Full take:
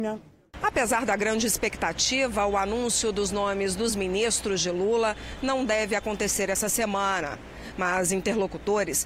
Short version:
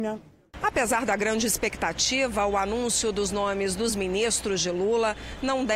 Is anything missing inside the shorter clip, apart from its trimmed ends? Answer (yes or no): no